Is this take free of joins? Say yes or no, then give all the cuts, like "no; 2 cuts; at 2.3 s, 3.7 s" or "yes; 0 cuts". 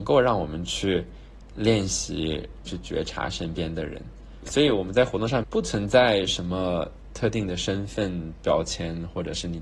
no; 2 cuts; at 2.7 s, 5.4 s